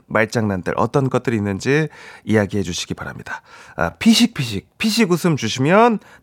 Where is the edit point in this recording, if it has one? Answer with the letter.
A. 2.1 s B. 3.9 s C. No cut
C